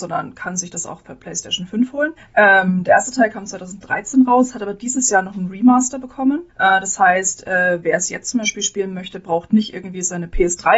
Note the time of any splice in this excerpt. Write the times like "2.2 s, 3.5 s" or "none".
2.2 s, 6.5 s

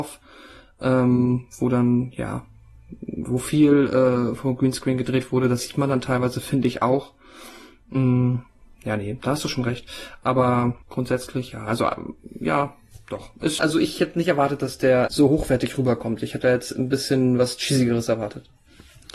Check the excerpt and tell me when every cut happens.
10.8 s, 13.6 s, 15.1 s

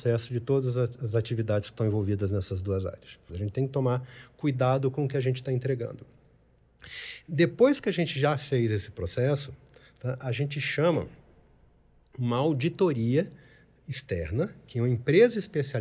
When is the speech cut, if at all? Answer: 3.3 s

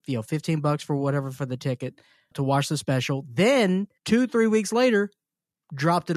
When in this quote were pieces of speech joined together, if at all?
2.3 s, 4.0 s

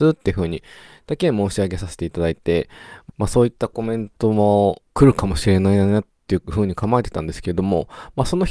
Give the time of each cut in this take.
3.1 s, 4.9 s

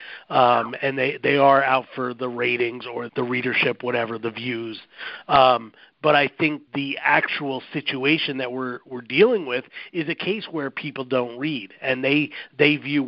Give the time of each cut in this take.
3.1 s, 6.7 s

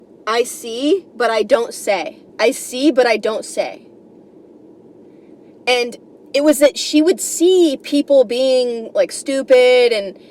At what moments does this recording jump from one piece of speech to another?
1.1 s, 2.3 s

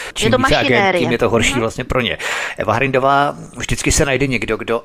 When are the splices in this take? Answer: none

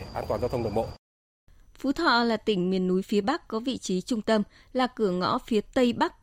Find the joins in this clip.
none

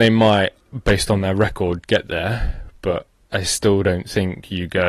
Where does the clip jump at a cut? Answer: 3.3 s

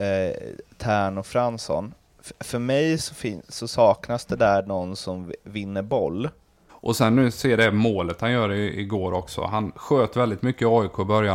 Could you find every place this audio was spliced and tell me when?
6.7 s

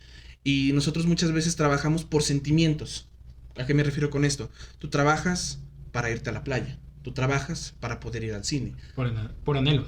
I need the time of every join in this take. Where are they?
none

